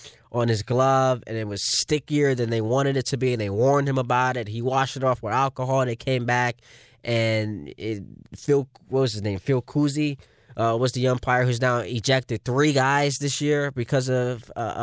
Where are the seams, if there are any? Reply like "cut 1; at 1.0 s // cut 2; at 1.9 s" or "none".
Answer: none